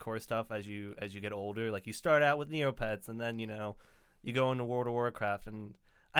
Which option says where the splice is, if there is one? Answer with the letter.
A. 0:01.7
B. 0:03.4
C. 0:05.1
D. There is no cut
D